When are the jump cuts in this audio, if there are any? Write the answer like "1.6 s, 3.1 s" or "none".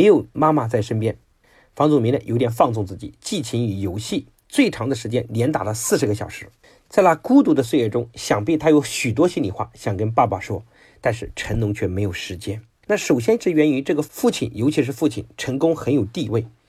12.8 s